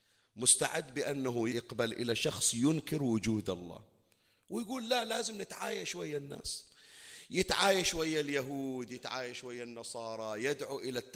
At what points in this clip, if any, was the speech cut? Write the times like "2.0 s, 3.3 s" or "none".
1.5 s